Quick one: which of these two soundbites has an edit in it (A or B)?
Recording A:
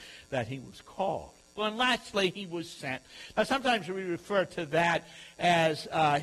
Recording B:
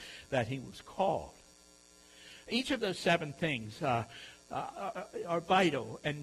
A